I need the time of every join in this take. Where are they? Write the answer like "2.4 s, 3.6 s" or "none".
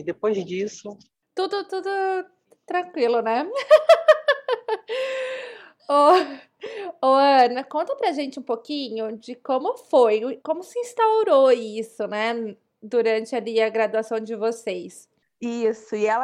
10.4 s, 15.2 s

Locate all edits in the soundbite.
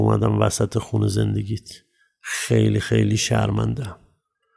none

